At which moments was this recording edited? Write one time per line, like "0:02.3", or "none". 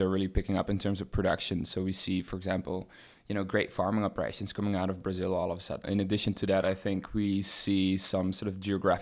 0:05.8